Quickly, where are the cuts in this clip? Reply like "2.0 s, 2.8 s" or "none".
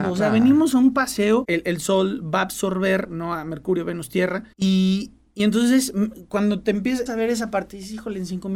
1.4 s, 4.5 s, 7.1 s